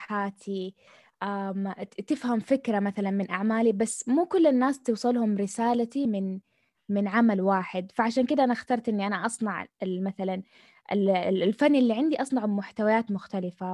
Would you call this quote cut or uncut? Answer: uncut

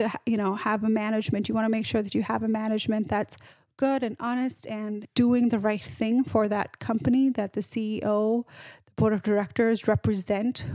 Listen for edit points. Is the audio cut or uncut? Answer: uncut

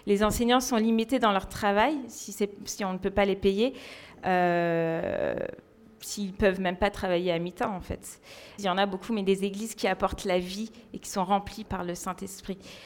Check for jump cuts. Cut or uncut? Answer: cut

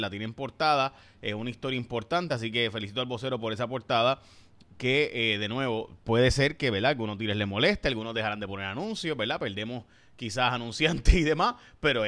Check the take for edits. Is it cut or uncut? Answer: uncut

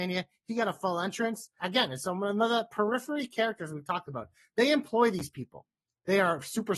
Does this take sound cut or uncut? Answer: cut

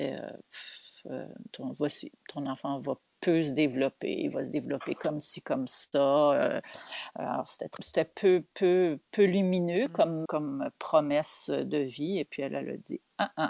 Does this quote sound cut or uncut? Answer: cut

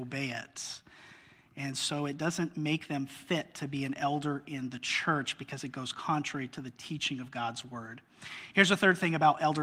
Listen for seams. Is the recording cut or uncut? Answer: uncut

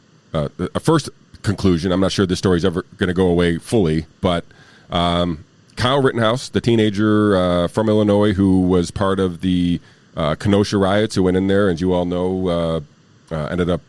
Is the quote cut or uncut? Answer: uncut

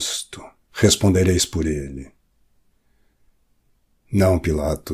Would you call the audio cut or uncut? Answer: uncut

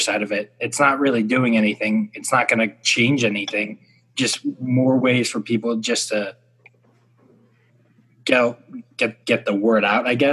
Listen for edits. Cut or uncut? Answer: cut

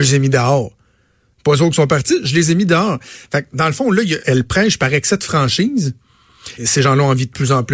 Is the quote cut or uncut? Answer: cut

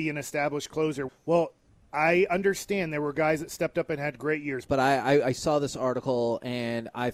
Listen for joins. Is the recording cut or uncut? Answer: cut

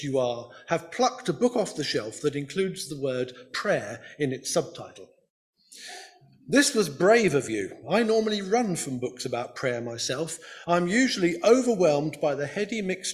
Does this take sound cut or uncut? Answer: uncut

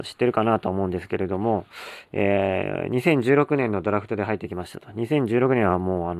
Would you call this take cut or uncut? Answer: uncut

